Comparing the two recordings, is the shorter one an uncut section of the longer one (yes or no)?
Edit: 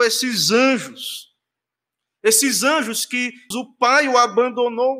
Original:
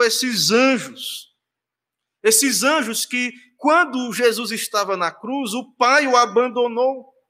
no